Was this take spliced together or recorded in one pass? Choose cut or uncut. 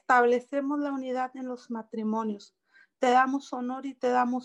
uncut